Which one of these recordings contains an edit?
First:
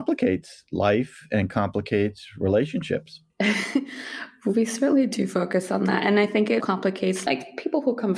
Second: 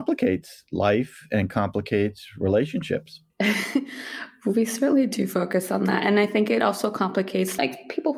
first; 1 cut; at 6.6 s

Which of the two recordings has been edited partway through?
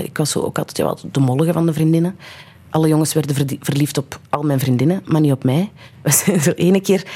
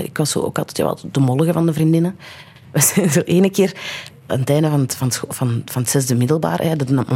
second; 2 cuts; at 2.6 s, 4.1 s

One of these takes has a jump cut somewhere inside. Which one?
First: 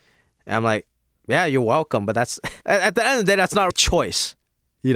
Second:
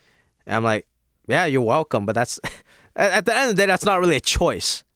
first; 2 cuts; at 2.6 s, 3.7 s

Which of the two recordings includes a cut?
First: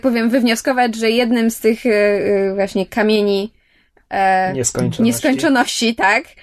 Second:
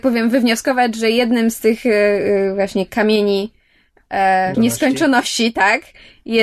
second; 1 cut; at 4.5 s

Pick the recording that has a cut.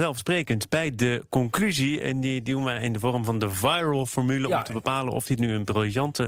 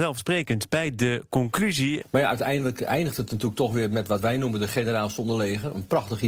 second; 1 cut; at 2.0 s

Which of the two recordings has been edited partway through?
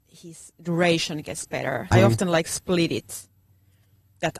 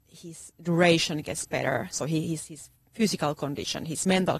first; 1 cut; at 1.9 s

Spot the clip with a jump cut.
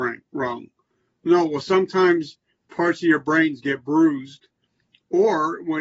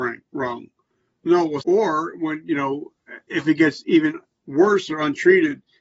second; 1 cut; at 1.6 s

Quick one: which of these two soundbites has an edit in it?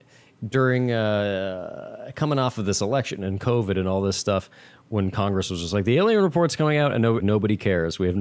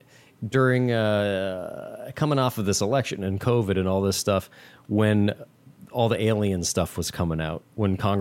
first; 2 cuts; at 4.8 s, 7.2 s

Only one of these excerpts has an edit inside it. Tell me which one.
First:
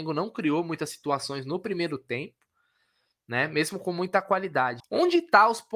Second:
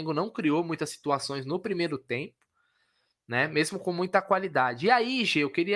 first; 1 cut; at 4.8 s

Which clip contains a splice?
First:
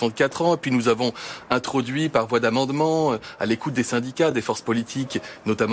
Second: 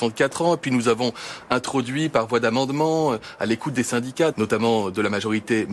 second; 1 cut; at 4.3 s

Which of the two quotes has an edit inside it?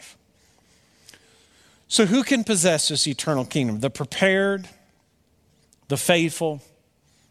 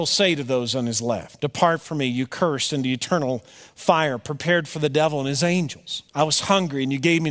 second; 1 cut; at 6.1 s

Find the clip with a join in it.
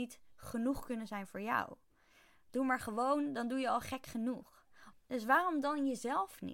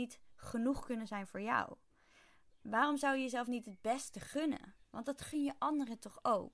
first; 2 cuts; at 2.5 s, 4.9 s

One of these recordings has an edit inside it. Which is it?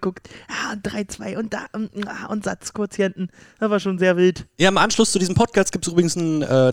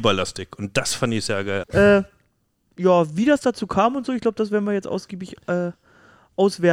second; 1 cut; at 1.6 s

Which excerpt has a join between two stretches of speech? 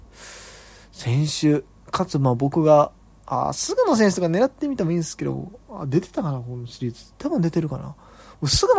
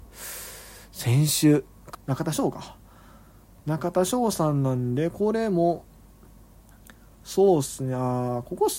second; 1 cut; at 1.9 s

